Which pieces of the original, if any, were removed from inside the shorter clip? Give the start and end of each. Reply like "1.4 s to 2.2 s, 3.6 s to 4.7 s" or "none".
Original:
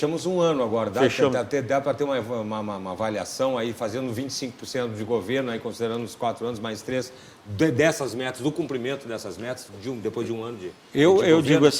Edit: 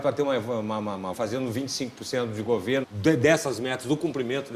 2.9 s to 3.7 s, 5.4 s to 7.4 s